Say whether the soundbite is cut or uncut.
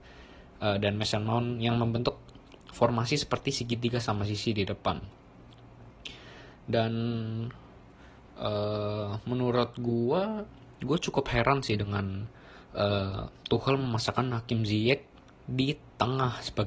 uncut